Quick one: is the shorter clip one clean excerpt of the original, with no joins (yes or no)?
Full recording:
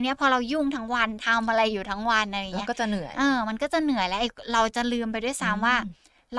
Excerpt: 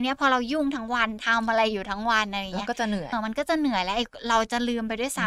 no